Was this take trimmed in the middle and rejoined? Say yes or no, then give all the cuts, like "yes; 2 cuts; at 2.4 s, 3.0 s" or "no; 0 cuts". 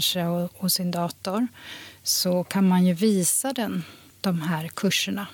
yes; 1 cut; at 4.1 s